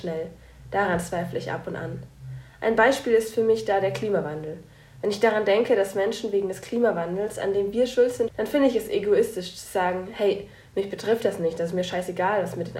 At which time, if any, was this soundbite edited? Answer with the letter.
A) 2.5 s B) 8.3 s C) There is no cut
B